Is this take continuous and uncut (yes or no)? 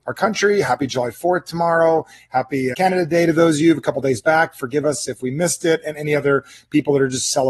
no